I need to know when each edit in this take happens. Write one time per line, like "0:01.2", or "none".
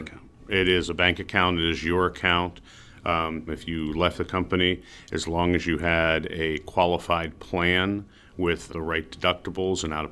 0:03.5
0:08.7